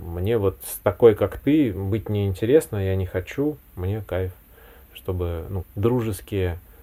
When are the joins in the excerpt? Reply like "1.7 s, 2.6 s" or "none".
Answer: 5.6 s